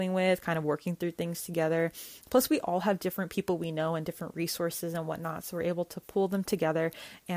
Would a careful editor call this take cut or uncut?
uncut